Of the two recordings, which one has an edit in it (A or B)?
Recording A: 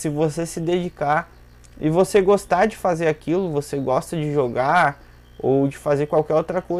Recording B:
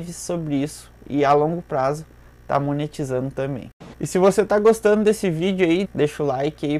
B